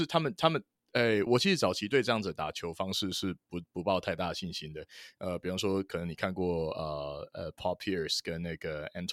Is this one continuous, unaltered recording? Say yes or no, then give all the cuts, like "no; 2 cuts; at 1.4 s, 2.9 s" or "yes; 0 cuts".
no; 1 cut; at 1.3 s